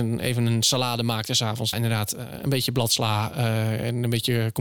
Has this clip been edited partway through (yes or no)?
yes